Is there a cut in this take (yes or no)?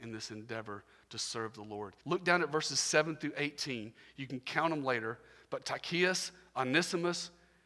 yes